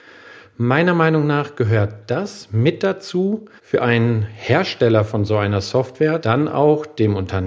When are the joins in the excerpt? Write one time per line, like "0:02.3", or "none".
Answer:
0:03.6
0:06.2